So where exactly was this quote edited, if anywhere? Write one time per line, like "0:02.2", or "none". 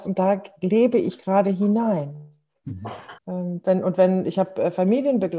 0:03.2